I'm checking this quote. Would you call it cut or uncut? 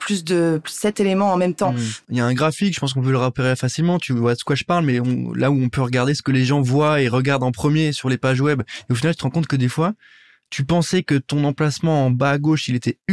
cut